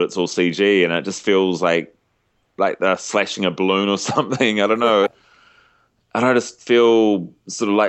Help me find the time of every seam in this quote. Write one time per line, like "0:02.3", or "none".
0:05.1
0:06.6